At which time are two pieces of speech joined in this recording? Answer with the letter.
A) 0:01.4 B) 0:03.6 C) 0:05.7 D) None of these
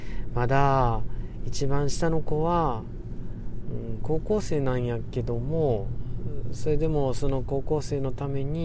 D